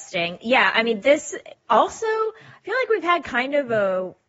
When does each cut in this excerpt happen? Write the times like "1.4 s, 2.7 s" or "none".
none